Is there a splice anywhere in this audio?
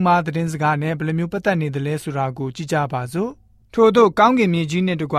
no; 0 cuts

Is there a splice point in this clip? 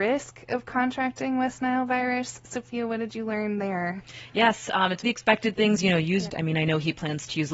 yes; 2 cuts; at 5.0 s, 6.3 s

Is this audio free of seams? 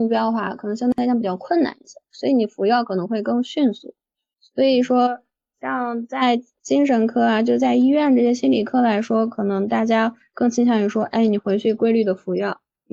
yes; 0 cuts

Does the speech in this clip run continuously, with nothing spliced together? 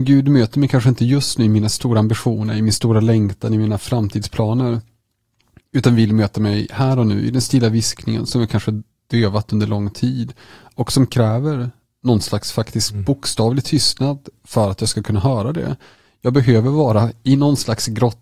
yes; 0 cuts

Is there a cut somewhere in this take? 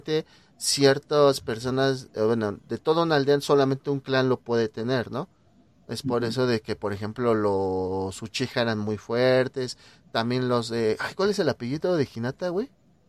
no; 0 cuts

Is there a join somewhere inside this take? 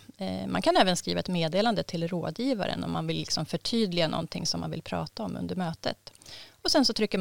no; 0 cuts

